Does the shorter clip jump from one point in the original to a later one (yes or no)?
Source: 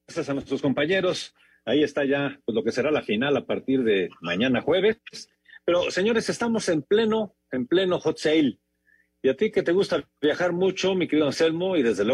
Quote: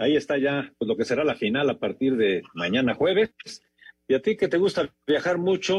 yes